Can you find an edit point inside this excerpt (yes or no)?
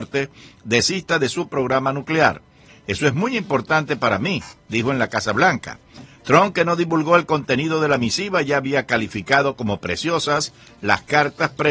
yes